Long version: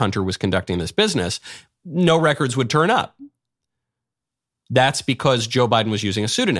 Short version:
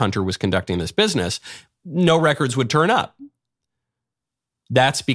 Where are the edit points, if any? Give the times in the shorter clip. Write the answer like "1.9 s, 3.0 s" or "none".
none